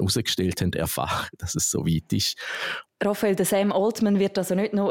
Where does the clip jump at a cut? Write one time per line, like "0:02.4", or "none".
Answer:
0:02.9

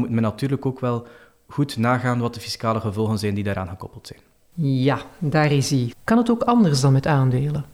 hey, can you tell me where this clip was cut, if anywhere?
0:05.9

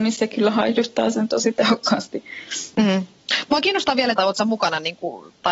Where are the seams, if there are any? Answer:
0:02.7
0:04.1

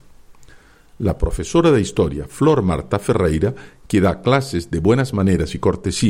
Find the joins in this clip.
none

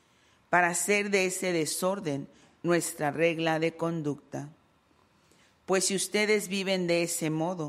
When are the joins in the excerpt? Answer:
none

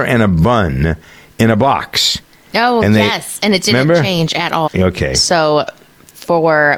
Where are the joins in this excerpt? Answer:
0:04.7

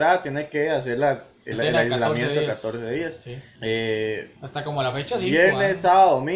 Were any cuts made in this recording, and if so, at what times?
0:01.5
0:03.5

